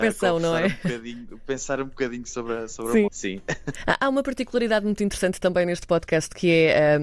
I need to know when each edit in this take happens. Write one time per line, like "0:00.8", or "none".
0:03.1